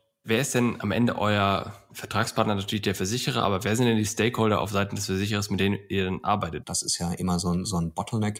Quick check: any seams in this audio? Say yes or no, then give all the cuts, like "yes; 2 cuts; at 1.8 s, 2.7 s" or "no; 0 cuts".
yes; 1 cut; at 6.6 s